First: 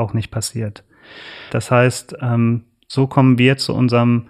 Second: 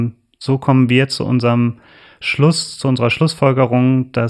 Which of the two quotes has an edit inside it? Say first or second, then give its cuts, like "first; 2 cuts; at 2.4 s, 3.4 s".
first; 1 cut; at 1.5 s